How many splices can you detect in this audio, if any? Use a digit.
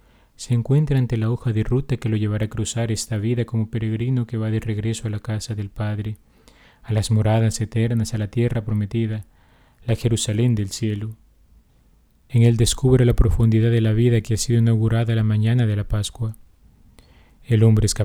1